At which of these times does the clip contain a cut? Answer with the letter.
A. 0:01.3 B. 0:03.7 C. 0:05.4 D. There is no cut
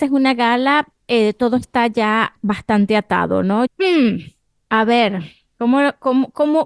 B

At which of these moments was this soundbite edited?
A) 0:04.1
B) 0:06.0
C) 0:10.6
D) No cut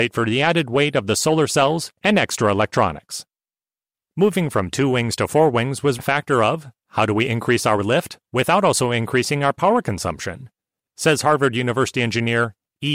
B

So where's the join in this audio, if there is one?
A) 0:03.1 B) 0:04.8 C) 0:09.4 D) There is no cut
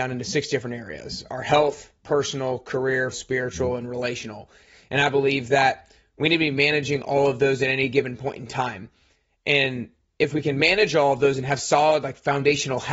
A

